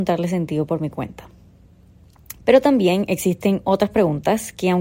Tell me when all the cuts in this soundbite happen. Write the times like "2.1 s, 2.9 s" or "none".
2.4 s